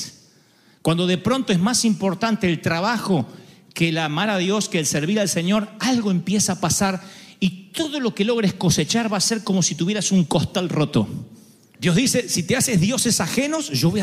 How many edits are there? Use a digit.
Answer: 0